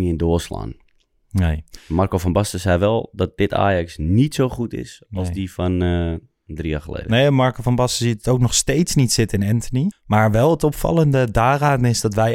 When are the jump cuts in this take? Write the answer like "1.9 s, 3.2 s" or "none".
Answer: 9.9 s